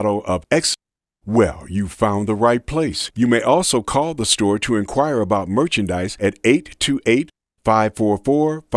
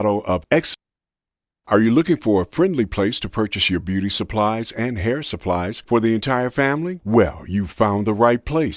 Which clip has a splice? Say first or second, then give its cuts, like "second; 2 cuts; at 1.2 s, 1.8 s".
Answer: first; 2 cuts; at 1.2 s, 3.1 s